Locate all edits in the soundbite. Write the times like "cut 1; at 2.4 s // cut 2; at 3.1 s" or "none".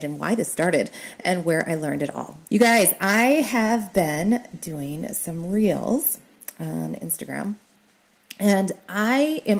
cut 1; at 2.5 s